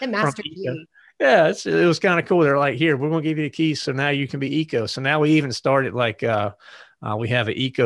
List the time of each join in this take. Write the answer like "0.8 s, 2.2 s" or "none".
none